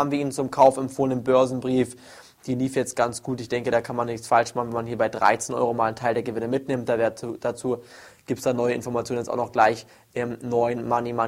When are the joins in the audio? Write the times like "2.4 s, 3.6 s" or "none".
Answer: none